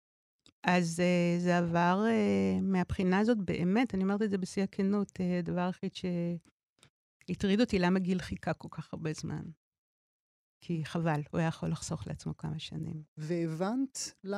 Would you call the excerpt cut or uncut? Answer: uncut